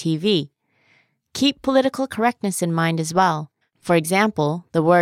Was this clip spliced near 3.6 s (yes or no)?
yes